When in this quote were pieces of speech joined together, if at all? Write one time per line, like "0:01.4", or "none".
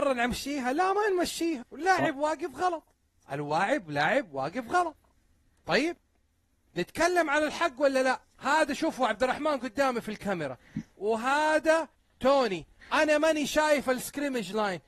0:01.7
0:08.3